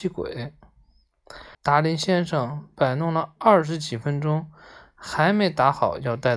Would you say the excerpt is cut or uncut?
cut